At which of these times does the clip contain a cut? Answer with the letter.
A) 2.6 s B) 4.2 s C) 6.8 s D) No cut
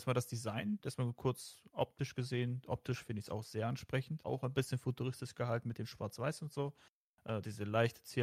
B